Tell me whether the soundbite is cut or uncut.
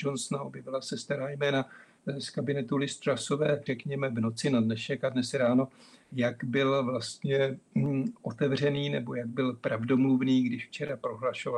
cut